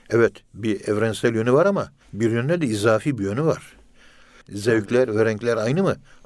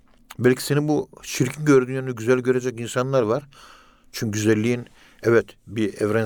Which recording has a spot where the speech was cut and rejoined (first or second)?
first